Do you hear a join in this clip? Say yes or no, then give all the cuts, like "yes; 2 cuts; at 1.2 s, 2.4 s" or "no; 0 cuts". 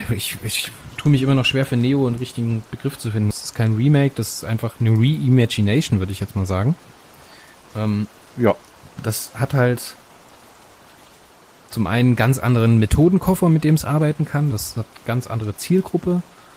yes; 2 cuts; at 3.3 s, 14.5 s